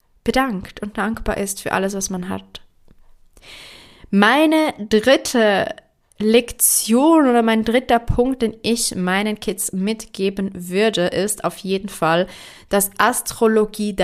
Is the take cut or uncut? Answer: uncut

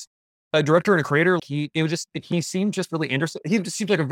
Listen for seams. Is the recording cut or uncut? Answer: cut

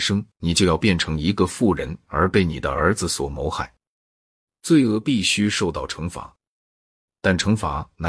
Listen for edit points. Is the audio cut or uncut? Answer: uncut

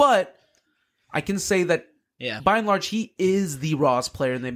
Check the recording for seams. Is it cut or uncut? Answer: uncut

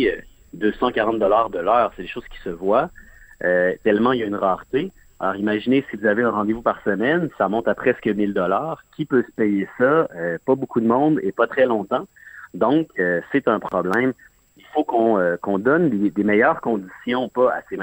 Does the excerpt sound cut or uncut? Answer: uncut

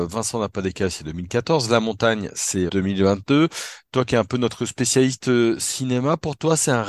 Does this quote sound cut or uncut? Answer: cut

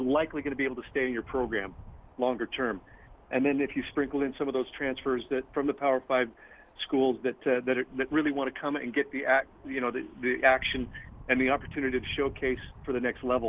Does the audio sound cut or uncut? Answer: uncut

